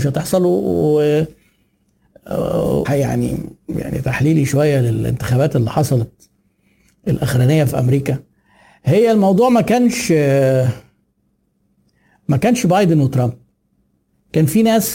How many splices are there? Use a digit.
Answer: 1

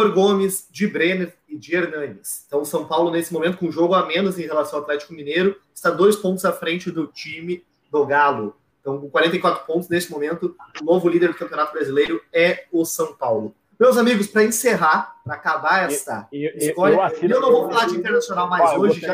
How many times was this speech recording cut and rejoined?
1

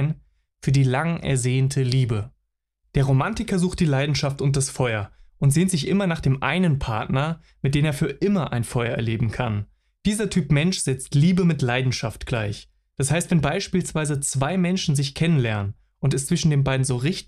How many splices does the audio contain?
1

